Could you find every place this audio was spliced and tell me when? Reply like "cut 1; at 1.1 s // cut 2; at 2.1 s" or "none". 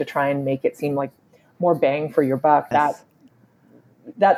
cut 1; at 2.7 s